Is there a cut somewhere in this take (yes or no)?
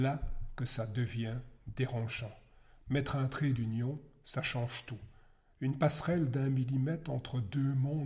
no